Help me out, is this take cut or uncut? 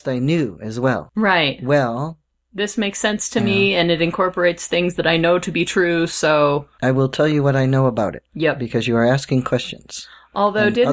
uncut